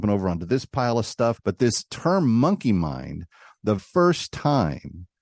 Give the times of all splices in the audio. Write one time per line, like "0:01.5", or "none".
0:01.4
0:03.8